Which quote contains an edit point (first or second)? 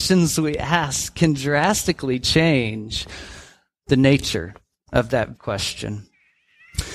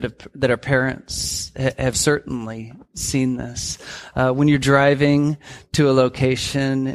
first